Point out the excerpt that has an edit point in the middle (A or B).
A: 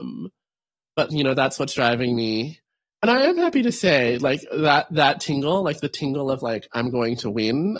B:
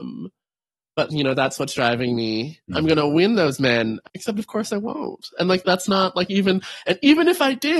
B